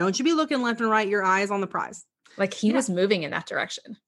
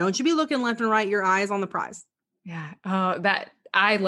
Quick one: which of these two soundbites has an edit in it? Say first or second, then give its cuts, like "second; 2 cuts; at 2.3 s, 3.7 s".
first; 1 cut; at 2.2 s